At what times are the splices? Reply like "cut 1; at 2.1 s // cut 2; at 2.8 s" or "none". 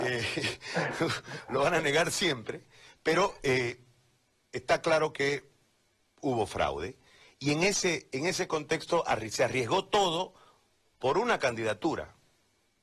none